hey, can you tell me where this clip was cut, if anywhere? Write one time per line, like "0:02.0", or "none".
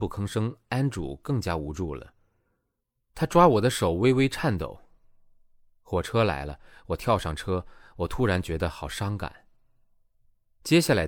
none